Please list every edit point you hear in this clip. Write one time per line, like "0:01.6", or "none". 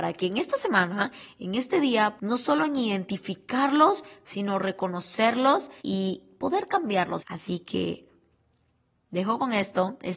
0:02.2
0:05.8
0:07.2